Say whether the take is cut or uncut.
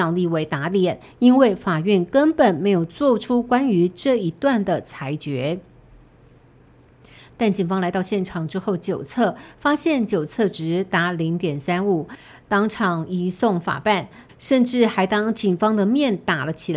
cut